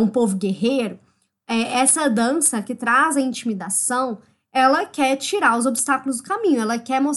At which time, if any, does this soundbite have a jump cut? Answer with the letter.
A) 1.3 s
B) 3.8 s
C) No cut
C